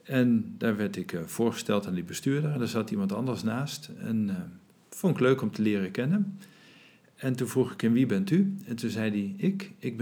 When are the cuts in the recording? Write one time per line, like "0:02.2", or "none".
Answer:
none